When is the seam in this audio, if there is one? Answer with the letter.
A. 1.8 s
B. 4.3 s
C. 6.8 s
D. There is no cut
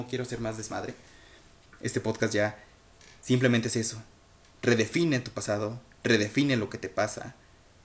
D